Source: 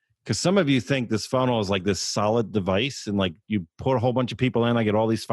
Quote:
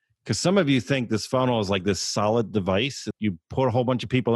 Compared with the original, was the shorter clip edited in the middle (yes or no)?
yes